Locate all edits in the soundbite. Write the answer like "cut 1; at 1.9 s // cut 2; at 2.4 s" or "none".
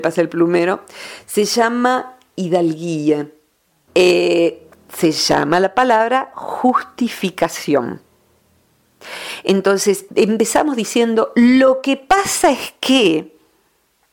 cut 1; at 3.9 s // cut 2; at 10.1 s